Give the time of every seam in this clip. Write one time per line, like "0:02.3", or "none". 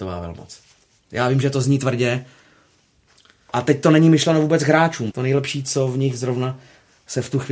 0:05.1